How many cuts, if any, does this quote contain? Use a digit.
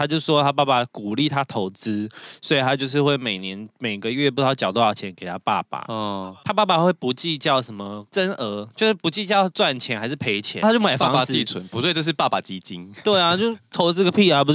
1